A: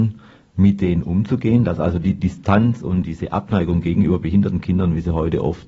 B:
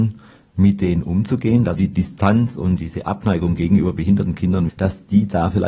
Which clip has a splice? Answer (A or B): B